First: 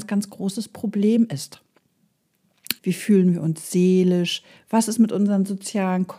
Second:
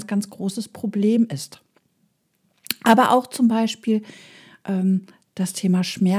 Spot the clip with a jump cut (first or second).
first